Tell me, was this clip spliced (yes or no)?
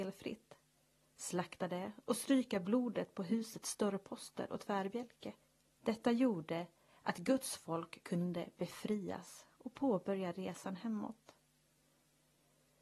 yes